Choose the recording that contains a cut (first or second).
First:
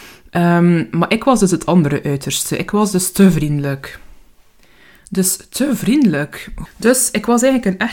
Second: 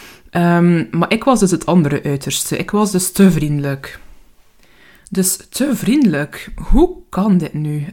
first